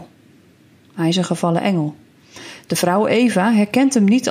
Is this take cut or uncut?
uncut